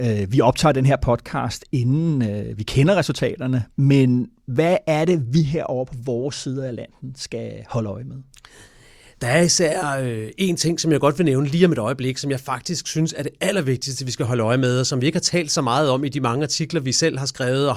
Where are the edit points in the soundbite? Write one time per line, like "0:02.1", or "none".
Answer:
none